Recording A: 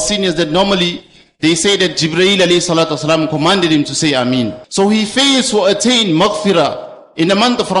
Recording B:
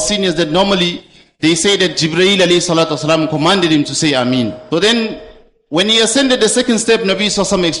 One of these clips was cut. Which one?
A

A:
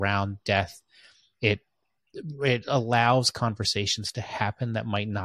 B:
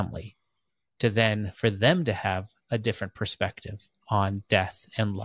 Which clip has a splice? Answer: B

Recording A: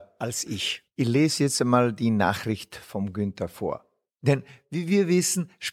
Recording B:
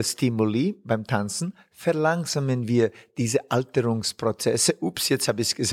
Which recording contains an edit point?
A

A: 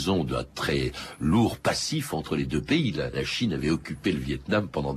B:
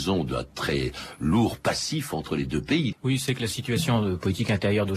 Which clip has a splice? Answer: B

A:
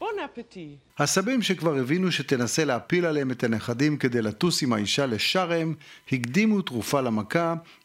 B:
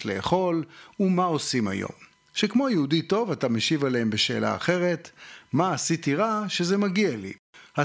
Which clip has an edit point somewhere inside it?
A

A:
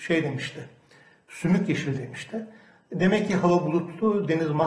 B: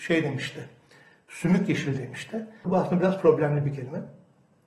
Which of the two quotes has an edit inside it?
B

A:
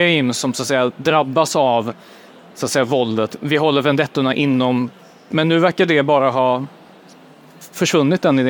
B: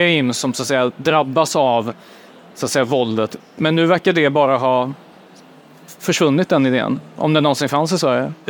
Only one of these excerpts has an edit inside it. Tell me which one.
B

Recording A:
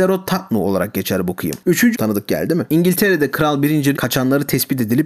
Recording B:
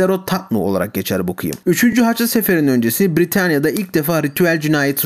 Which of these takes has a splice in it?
A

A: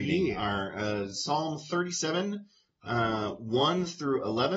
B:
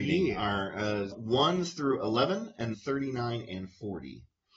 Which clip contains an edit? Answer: B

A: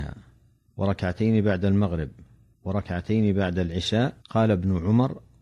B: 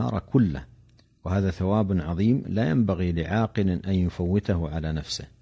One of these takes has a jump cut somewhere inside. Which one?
A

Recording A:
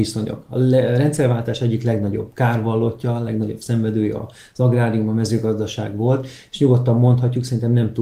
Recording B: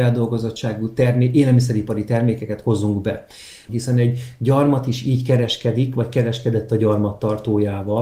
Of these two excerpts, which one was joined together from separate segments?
B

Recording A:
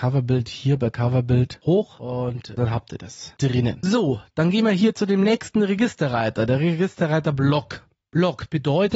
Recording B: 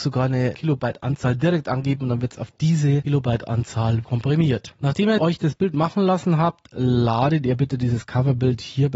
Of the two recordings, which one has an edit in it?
B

